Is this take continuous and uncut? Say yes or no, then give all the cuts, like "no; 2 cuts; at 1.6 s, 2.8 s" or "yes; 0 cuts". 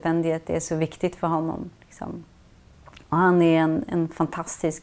yes; 0 cuts